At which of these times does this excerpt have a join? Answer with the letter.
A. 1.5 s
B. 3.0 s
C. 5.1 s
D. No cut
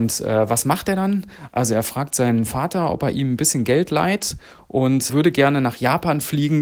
C